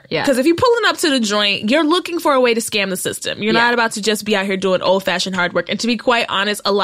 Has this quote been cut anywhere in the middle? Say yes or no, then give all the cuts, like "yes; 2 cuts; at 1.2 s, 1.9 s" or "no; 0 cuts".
no; 0 cuts